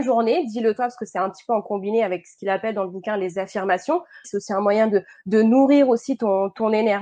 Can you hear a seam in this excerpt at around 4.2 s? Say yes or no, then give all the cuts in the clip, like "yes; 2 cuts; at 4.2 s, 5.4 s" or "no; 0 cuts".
yes; 1 cut; at 4.2 s